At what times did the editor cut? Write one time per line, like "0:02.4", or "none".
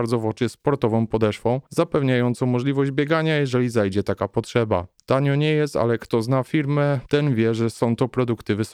none